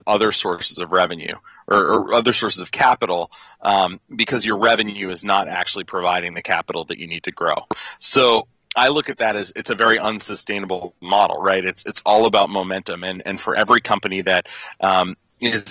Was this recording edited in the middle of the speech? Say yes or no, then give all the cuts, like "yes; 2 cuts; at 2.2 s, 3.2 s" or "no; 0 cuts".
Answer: no; 0 cuts